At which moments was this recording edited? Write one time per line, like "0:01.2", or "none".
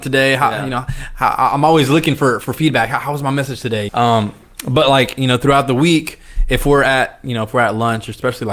0:03.9

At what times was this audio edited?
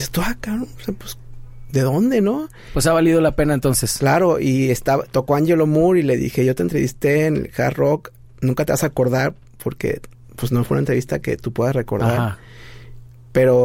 none

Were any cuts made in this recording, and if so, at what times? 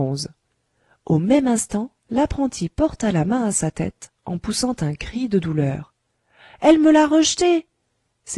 none

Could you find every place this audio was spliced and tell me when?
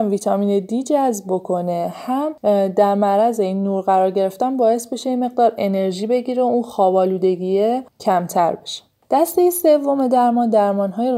none

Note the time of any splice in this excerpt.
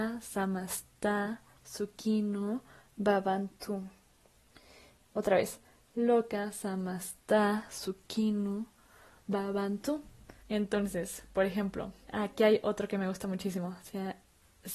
0:05.0
0:10.4
0:12.0

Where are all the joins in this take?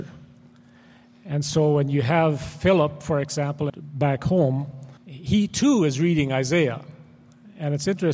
0:03.7
0:05.0

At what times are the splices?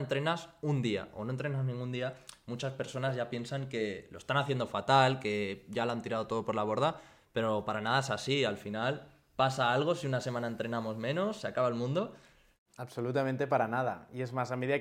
none

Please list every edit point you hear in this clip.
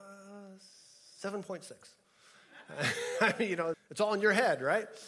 0:03.7

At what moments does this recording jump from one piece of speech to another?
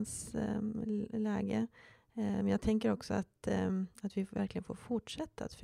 none

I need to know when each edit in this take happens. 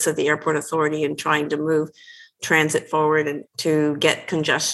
0:03.4

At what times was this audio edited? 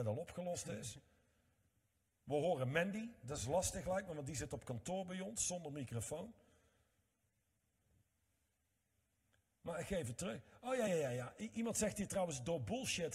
none

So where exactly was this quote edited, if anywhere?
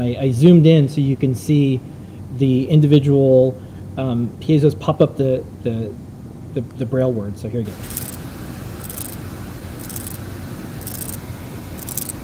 none

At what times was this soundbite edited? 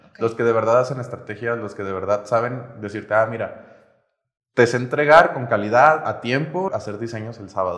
0:06.7

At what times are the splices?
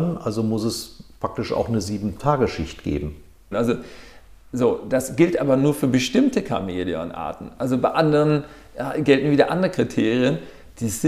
0:03.5

